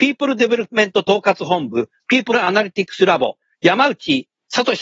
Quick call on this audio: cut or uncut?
uncut